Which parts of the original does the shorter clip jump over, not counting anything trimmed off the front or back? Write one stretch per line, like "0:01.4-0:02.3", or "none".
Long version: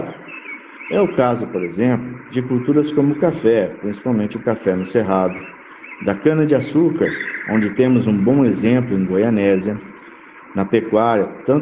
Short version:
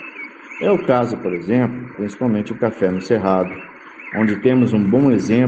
0:02.2-0:03.8
0:06.0-0:07.5